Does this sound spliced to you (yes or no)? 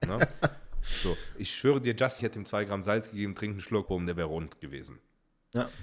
yes